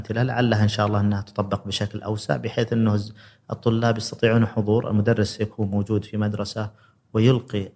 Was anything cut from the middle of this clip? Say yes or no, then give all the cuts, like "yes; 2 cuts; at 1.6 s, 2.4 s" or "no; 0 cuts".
no; 0 cuts